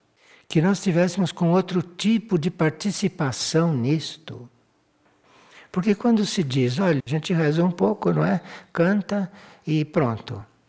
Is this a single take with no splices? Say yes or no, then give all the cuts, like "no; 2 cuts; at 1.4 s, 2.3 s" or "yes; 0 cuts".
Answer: no; 1 cut; at 7.0 s